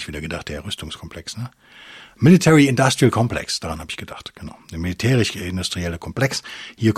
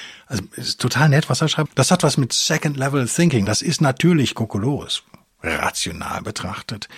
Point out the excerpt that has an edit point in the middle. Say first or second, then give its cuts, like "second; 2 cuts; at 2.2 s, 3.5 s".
second; 2 cuts; at 1.7 s, 3.5 s